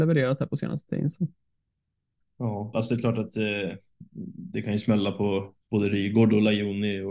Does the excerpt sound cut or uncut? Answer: cut